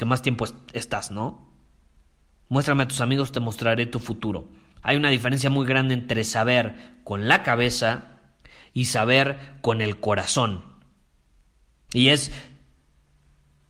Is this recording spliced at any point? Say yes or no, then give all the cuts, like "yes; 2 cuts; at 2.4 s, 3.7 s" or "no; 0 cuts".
yes; 2 cuts; at 4.8 s, 11.9 s